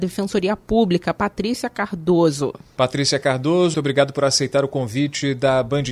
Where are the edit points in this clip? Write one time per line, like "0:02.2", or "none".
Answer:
0:03.7